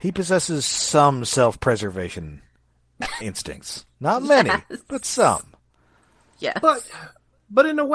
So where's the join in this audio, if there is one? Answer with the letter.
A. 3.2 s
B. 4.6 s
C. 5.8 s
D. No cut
A